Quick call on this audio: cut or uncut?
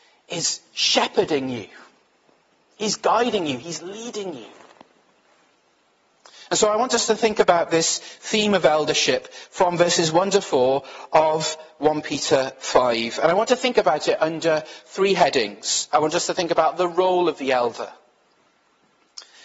uncut